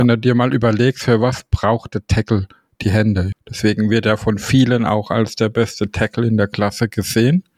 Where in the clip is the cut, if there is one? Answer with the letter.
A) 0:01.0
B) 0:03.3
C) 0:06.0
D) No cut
B